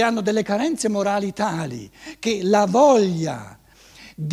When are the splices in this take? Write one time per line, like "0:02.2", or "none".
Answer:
none